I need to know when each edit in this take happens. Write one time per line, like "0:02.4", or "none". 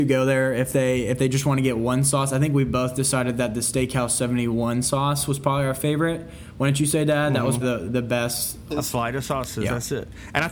0:07.6
0:08.7